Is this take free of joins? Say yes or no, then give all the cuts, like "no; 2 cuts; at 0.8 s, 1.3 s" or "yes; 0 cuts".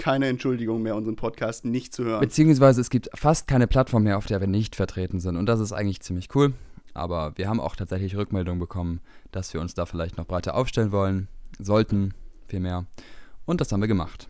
no; 1 cut; at 7.0 s